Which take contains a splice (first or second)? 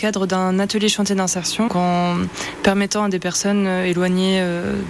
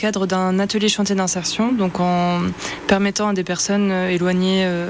first